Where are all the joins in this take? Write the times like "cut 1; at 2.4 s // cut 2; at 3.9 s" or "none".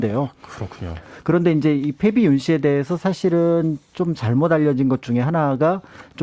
none